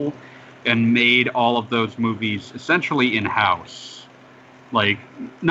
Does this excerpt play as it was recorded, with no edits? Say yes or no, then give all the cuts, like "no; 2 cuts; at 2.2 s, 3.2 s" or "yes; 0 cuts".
yes; 0 cuts